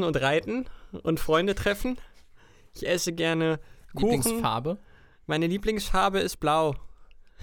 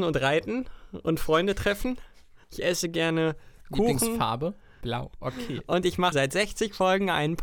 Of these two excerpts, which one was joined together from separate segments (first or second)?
second